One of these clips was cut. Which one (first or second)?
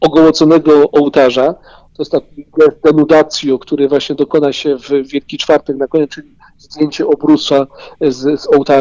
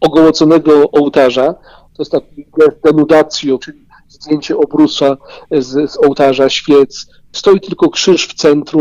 second